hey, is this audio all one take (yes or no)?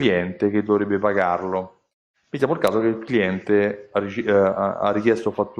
yes